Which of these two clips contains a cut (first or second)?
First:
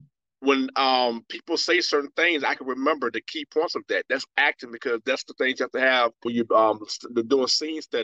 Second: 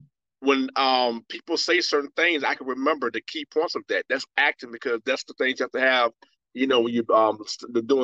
first